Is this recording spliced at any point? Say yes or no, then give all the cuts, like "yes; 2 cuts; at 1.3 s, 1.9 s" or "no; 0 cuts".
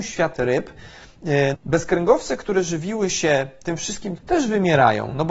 yes; 2 cuts; at 1.5 s, 4.2 s